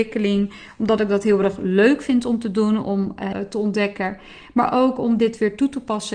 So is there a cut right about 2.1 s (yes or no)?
no